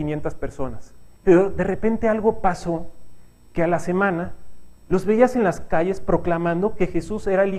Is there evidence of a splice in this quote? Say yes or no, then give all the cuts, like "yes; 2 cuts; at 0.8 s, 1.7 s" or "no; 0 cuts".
yes; 2 cuts; at 1.2 s, 4.8 s